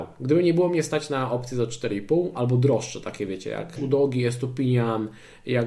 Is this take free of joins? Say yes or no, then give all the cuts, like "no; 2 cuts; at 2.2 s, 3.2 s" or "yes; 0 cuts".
no; 1 cut; at 3.8 s